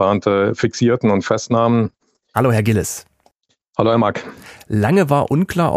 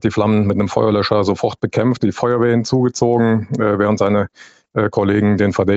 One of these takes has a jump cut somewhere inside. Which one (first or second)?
first